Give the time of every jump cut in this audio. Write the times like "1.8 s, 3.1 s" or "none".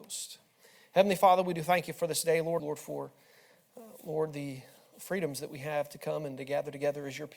2.6 s